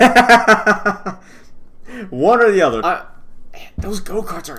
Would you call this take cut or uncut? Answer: cut